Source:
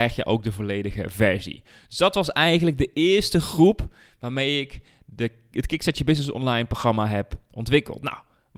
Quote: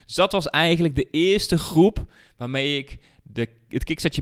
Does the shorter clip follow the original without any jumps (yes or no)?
yes